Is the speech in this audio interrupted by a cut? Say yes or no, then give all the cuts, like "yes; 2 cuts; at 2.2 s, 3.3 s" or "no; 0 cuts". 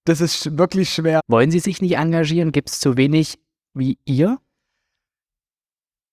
yes; 1 cut; at 1.2 s